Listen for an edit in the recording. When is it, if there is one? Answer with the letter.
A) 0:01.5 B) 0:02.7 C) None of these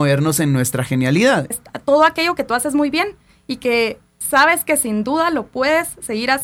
A